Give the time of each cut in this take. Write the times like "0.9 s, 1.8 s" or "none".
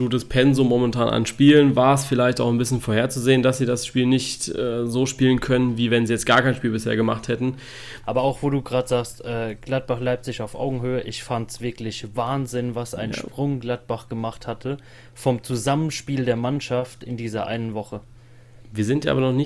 8.0 s